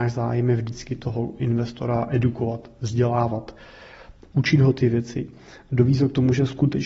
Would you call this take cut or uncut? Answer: uncut